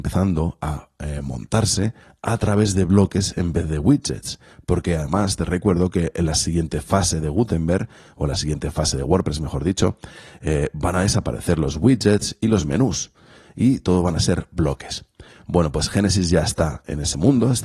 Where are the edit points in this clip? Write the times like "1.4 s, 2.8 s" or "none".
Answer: none